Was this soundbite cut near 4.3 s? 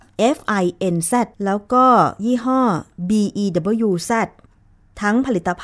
no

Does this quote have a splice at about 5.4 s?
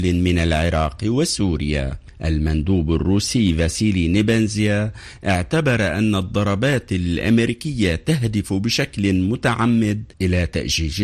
no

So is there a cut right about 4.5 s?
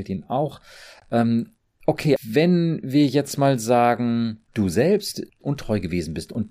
yes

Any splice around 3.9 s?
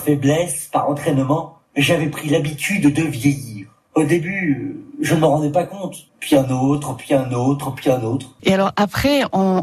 no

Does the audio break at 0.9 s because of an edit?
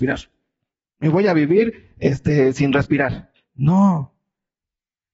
no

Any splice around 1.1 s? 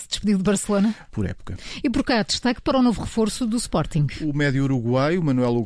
yes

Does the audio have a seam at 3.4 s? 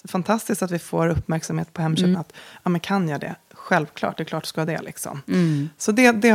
no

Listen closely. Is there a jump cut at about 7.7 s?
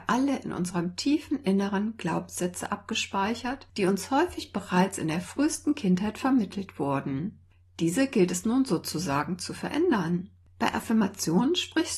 no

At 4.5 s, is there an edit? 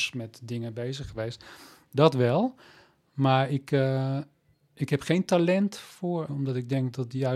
yes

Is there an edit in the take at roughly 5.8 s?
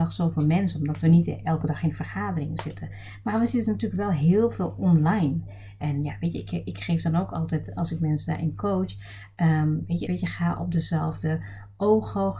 yes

